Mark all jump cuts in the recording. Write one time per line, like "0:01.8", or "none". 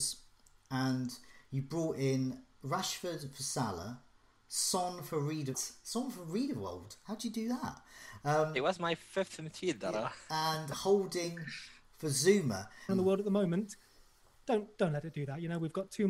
0:05.5
0:12.9